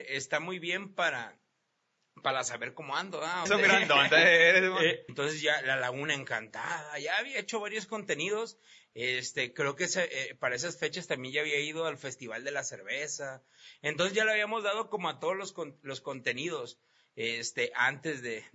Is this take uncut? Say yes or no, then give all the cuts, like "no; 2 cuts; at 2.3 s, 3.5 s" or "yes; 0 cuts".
no; 2 cuts; at 3.5 s, 5.1 s